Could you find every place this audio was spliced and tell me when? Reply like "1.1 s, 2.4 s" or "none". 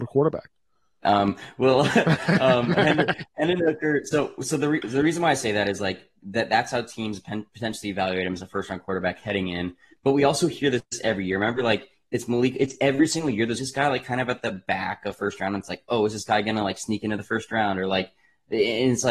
1.0 s, 13.6 s